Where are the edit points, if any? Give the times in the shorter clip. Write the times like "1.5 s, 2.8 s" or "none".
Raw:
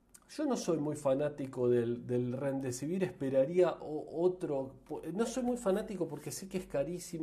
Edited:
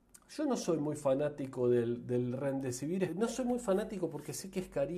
3.1 s